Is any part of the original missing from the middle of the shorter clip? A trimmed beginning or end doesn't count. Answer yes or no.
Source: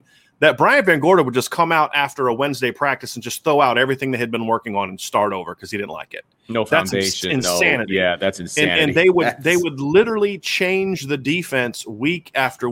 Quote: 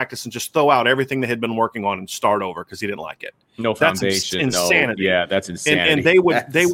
no